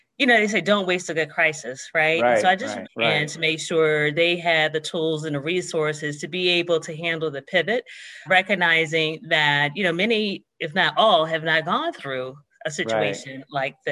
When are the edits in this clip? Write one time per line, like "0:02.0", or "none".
0:02.8
0:08.3